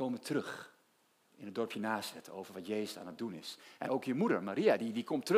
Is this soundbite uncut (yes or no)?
no